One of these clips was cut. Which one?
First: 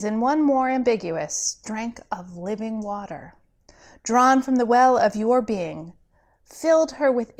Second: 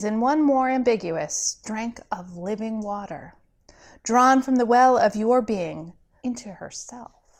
second; 1 cut; at 6.2 s

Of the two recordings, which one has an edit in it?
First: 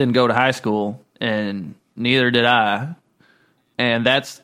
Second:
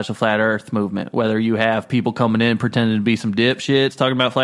first; 1 cut; at 1.1 s

